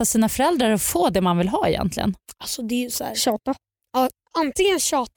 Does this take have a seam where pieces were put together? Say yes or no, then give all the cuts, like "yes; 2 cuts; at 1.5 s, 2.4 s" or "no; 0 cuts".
no; 0 cuts